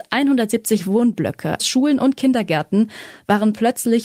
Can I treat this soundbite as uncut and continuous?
no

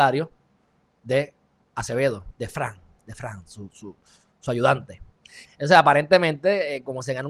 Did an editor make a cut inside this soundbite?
yes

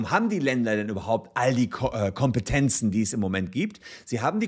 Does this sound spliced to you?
no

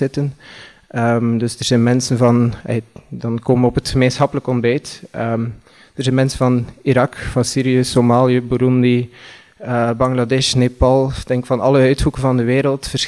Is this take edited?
no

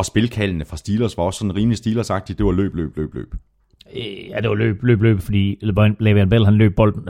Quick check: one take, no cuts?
no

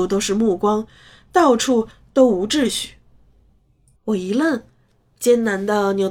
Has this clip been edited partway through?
yes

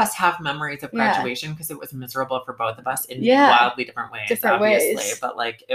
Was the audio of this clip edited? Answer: no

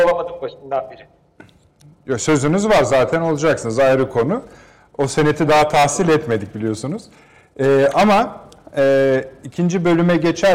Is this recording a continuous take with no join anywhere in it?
yes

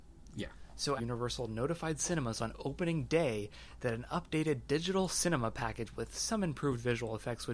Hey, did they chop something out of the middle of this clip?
yes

